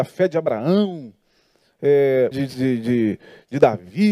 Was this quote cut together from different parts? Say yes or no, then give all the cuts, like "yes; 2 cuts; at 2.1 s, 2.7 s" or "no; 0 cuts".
yes; 1 cut; at 2.3 s